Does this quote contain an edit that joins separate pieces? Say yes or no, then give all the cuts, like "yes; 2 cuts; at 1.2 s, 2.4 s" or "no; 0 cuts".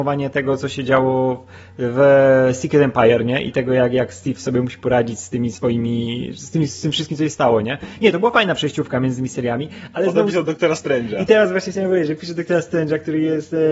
no; 0 cuts